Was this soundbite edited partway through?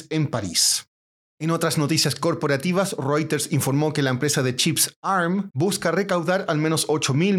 yes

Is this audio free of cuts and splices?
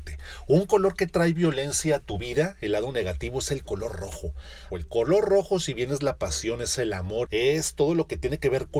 no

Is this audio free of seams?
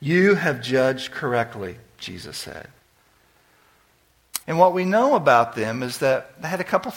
no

